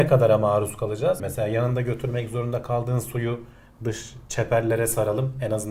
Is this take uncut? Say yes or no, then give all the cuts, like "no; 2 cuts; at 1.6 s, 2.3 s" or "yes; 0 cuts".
no; 1 cut; at 1.2 s